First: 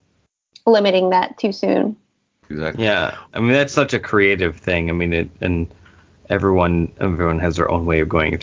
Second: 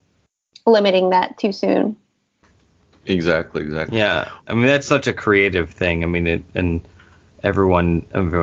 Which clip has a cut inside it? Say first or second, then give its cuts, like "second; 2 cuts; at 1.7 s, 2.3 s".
first; 1 cut; at 2.5 s